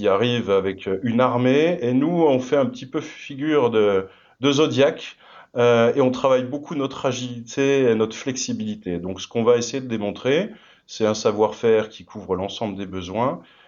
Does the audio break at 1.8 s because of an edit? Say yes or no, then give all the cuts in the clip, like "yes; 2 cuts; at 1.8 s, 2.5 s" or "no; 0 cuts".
no; 0 cuts